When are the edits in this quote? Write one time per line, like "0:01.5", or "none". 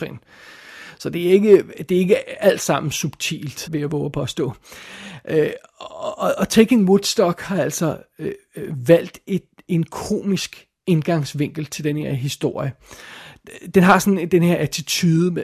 0:03.7